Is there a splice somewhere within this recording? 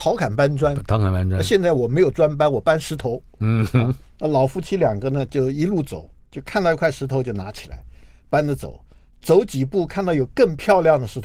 no; 0 cuts

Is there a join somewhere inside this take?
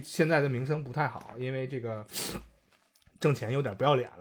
no; 0 cuts

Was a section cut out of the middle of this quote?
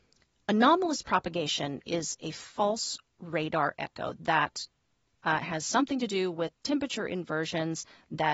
yes; 1 cut; at 5.1 s

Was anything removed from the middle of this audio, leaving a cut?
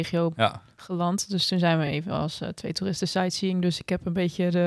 no; 0 cuts

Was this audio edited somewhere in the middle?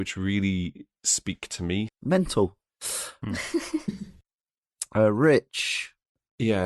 yes; 1 cut; at 1.9 s

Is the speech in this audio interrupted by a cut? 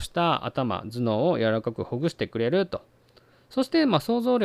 no; 0 cuts

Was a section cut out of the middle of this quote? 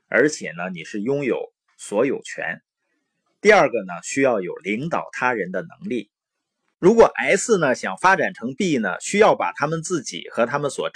no; 0 cuts

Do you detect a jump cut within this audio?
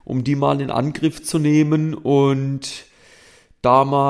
no; 0 cuts

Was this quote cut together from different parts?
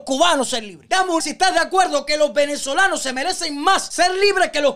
yes; 1 cut; at 1.2 s

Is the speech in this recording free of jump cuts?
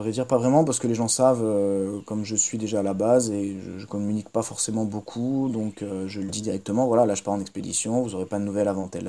yes; 0 cuts

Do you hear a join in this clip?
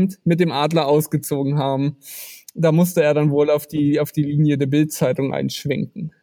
no; 0 cuts

